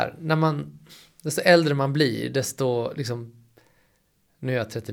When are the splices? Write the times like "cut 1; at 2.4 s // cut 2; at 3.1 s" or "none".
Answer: none